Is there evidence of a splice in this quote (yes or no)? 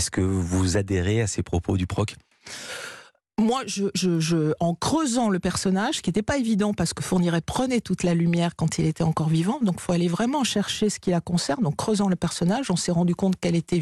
no